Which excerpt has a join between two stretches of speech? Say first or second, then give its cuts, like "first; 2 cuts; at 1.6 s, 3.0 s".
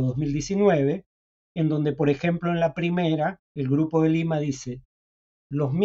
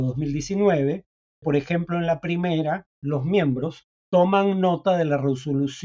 second; 2 cuts; at 1.4 s, 2.9 s